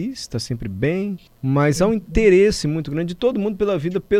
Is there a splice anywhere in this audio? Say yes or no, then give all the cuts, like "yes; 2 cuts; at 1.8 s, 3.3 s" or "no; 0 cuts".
yes; 1 cut; at 1.3 s